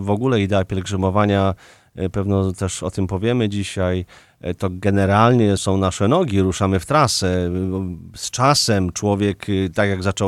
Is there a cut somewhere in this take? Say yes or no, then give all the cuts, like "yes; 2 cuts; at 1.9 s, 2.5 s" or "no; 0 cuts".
yes; 1 cut; at 5.6 s